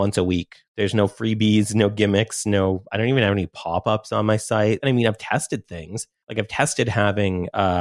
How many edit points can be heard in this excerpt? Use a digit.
1